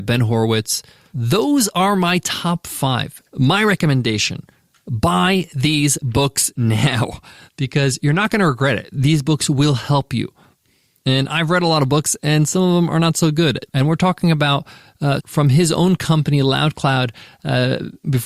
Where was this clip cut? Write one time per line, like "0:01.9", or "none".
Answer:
0:13.7
0:15.2